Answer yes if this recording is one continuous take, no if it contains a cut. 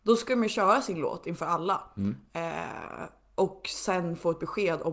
yes